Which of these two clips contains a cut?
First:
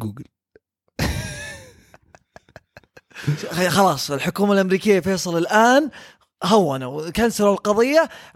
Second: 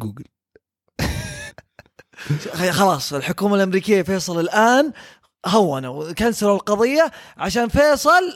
second; 1 cut; at 1.5 s

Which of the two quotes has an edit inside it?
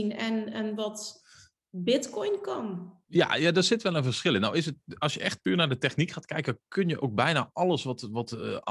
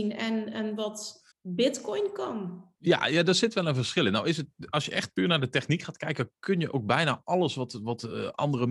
second; 1 cut; at 1.3 s

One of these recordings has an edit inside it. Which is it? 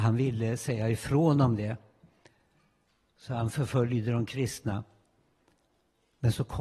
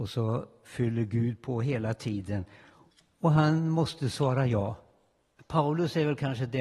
second; 1 cut; at 5.4 s

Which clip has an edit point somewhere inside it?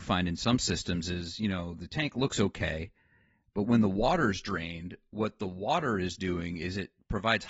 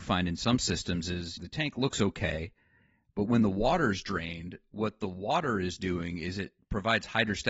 second; 1 cut; at 1.4 s

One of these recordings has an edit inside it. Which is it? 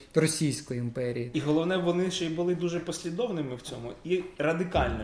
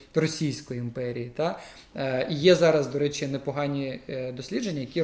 first; 1 cut; at 1.3 s

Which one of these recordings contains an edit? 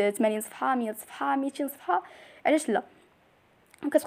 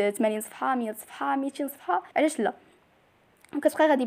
second; 1 cut; at 2.1 s

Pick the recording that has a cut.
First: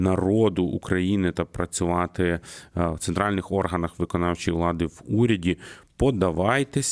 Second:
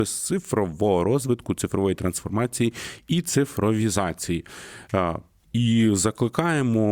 second; 1 cut; at 5.4 s

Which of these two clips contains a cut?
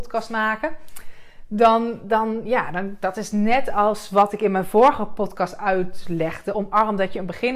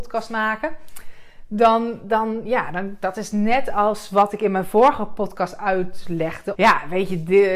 second; 1 cut; at 6.5 s

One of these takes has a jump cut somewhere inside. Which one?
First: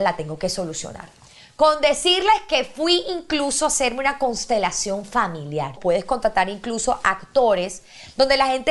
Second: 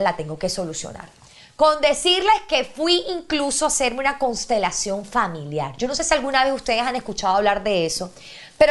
first; 1 cut; at 5.8 s

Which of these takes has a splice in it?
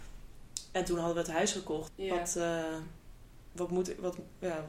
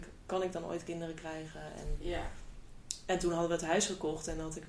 first; 1 cut; at 1.9 s

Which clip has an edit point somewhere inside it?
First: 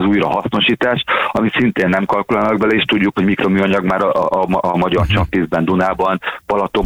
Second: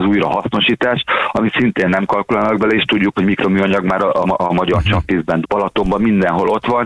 second; 2 cuts; at 4.2 s, 5.4 s

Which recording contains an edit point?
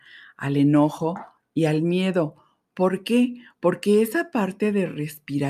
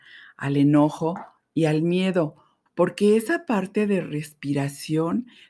second; 1 cut; at 2.7 s

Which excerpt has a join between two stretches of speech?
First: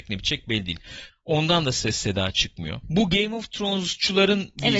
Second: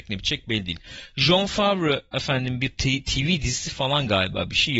first; 2 cuts; at 1.1 s, 2.8 s

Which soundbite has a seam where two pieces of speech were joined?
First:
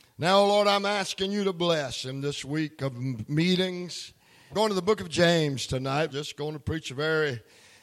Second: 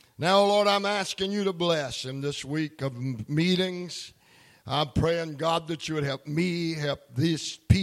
first; 2 cuts; at 4.5 s, 6.1 s

